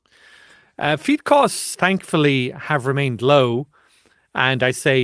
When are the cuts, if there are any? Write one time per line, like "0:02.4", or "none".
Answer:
0:01.7